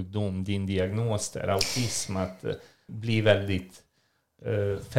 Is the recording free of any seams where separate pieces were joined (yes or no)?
no